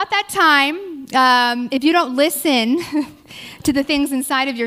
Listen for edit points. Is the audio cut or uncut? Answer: uncut